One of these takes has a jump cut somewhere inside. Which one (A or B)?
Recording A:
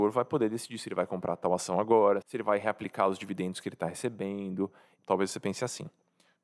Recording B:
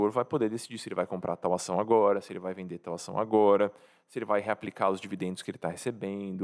A